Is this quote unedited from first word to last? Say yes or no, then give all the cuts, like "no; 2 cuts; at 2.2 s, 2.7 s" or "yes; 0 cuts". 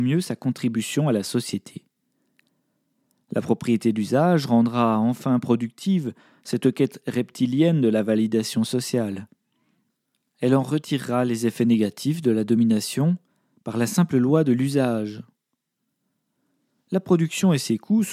yes; 0 cuts